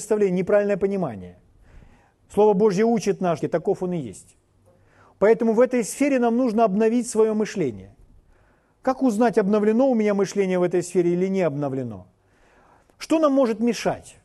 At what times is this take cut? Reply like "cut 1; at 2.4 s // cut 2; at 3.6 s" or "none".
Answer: cut 1; at 3.4 s // cut 2; at 12.9 s